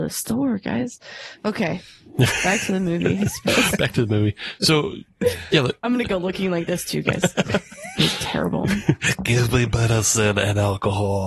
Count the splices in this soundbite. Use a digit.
0